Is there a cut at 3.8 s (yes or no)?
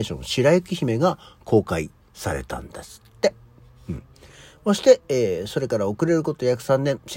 no